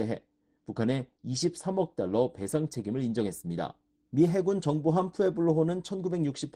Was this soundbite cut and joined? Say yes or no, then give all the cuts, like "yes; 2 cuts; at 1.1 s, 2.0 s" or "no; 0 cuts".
yes; 1 cut; at 4.1 s